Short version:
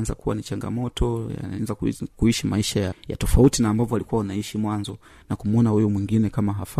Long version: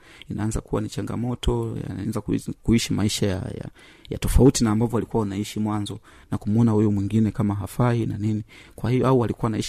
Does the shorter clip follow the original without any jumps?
no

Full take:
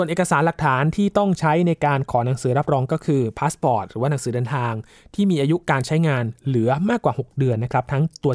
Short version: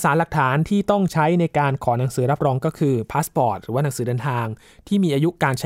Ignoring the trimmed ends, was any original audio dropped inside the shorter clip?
no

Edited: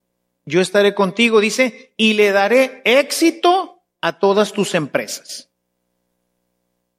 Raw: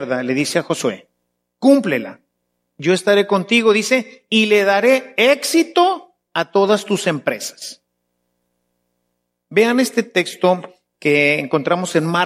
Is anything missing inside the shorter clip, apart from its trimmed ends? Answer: no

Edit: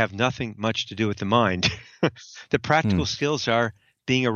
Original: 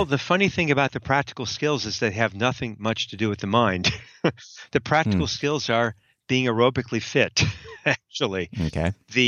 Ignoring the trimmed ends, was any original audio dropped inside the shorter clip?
no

